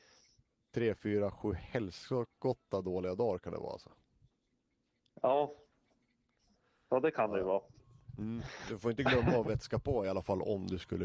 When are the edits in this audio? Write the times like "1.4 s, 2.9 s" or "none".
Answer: none